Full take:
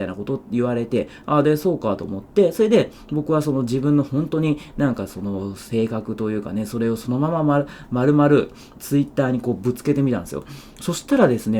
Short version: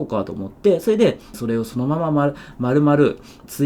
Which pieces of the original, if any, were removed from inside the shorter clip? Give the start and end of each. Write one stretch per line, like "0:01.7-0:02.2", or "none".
0:03.1-0:06.7